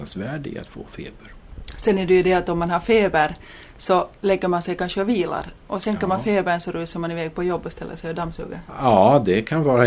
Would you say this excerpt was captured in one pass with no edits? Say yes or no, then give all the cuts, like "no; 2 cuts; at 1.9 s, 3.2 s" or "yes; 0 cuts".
yes; 0 cuts